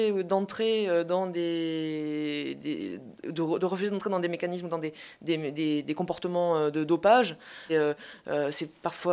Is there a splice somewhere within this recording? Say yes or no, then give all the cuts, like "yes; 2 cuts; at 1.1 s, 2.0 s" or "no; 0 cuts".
yes; 1 cut; at 7.7 s